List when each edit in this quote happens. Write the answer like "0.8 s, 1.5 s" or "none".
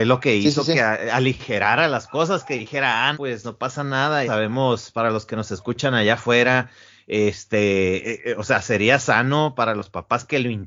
3.1 s, 4.3 s

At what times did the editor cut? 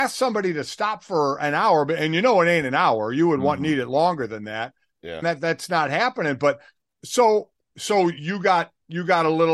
5.2 s

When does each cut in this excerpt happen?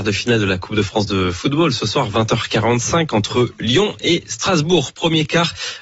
none

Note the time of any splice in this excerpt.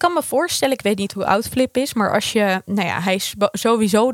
none

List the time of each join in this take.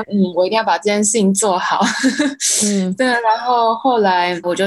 none

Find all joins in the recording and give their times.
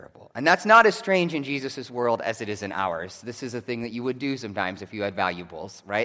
none

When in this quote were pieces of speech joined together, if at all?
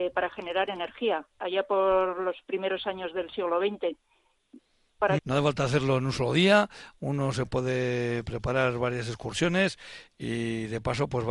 5.2 s

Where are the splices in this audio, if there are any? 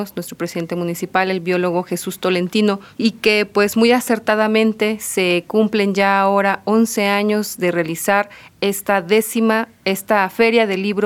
none

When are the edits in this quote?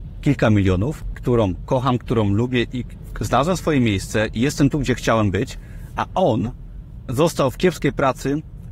1.1 s

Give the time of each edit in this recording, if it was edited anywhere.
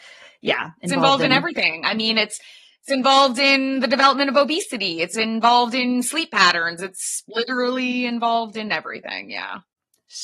none

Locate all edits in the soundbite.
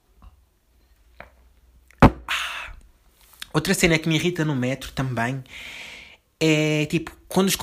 none

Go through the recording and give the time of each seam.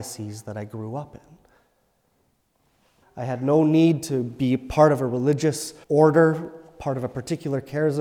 3.0 s, 5.8 s

